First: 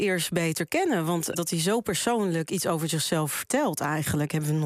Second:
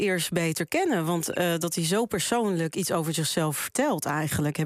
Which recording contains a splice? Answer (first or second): first